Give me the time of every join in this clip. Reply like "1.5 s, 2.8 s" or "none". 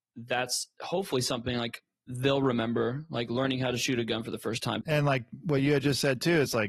4.8 s